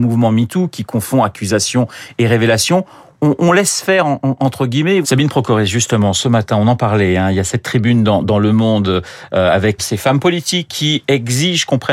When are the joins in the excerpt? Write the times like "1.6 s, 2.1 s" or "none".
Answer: 3.4 s, 5.0 s, 9.8 s

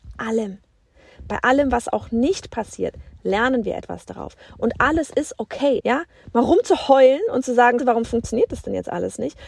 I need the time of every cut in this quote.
5.8 s, 7.8 s

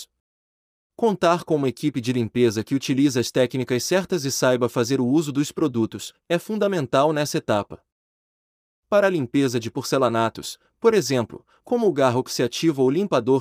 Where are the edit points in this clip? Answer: 11.6 s

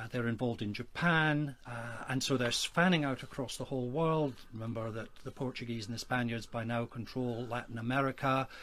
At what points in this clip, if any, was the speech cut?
1.6 s

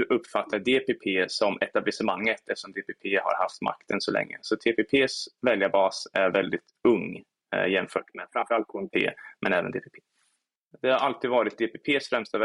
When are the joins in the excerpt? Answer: 10.7 s

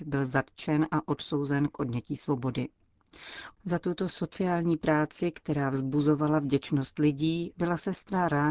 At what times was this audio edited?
3.6 s, 7.5 s

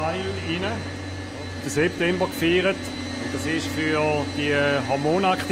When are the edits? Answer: 1.6 s

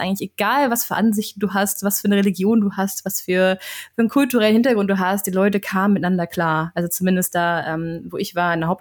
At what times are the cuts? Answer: none

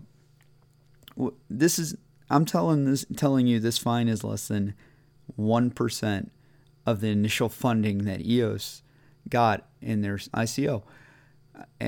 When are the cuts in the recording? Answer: 10.3 s

